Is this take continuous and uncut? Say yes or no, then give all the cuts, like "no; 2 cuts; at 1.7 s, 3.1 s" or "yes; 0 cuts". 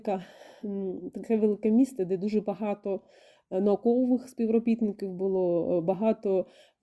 yes; 0 cuts